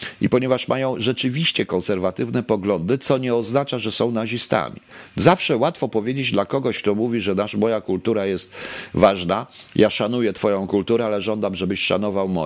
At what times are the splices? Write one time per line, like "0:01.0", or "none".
none